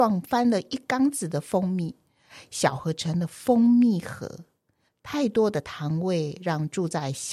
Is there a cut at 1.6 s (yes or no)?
no